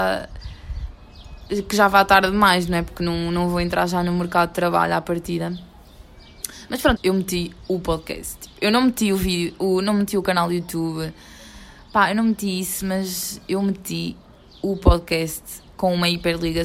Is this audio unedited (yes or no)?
no